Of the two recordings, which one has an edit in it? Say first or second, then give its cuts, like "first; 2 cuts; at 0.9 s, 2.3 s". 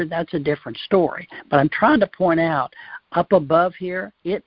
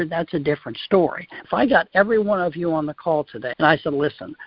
second; 2 cuts; at 1.4 s, 3.5 s